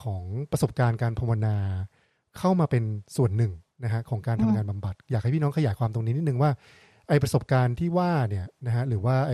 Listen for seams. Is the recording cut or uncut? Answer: uncut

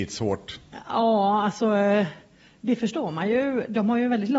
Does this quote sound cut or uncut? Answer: uncut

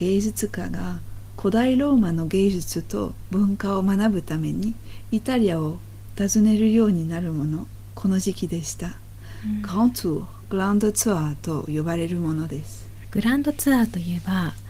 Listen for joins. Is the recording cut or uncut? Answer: cut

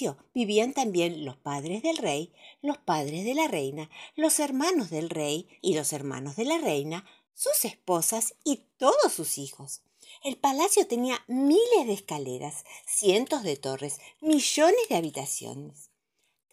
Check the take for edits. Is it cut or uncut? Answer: cut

